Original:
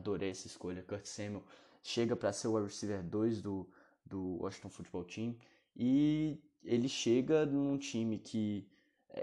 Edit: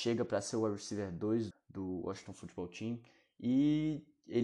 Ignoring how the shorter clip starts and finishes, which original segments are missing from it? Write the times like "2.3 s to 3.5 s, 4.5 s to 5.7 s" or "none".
3.4 s to 3.9 s